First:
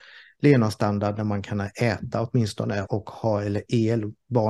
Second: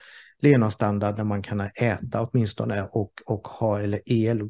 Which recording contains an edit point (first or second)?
first